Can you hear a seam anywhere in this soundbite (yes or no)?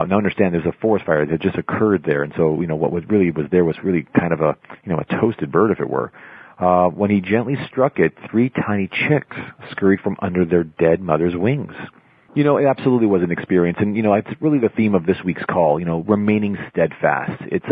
yes